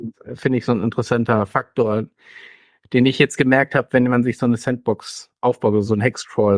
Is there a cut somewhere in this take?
no; 0 cuts

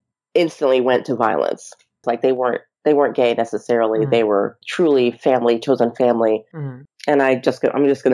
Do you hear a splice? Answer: yes; 2 cuts; at 2.0 s, 6.9 s

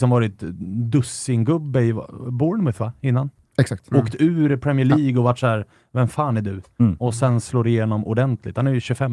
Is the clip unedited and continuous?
yes; 0 cuts

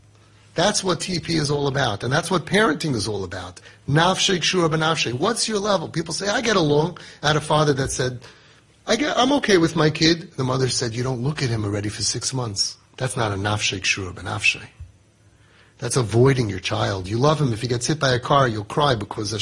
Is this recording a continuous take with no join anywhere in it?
no; 1 cut; at 12.9 s

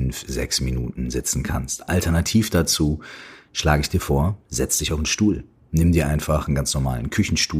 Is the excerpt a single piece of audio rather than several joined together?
yes; 0 cuts

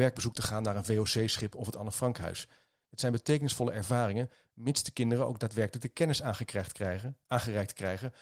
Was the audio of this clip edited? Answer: no; 0 cuts

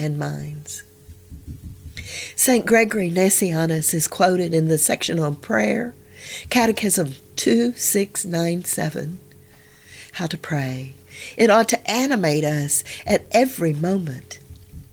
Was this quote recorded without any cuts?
no; 1 cut; at 11.4 s

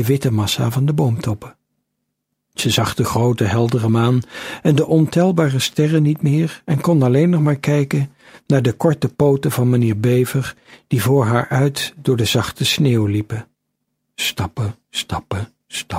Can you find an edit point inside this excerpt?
no; 0 cuts

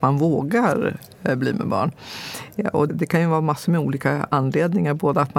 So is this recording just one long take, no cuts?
no; 1 cut; at 2.9 s

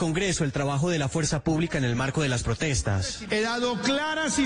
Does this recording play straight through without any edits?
yes; 0 cuts

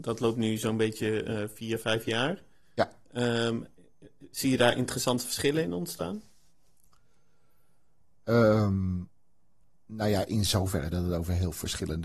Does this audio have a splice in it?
no; 0 cuts

